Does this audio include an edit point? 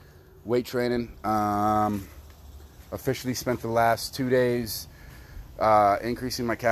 no; 0 cuts

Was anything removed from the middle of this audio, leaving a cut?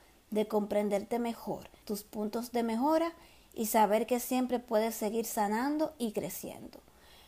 yes; 1 cut; at 1.8 s

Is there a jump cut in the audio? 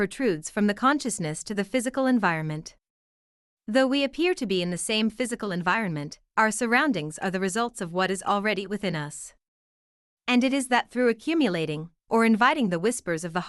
no; 0 cuts

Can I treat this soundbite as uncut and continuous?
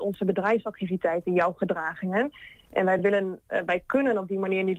yes; 0 cuts

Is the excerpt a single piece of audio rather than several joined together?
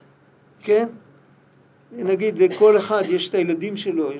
yes; 0 cuts

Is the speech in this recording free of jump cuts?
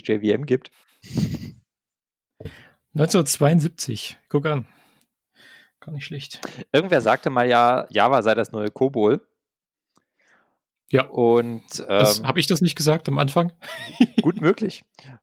yes; 0 cuts

